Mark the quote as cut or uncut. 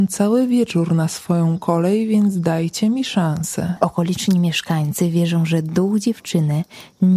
cut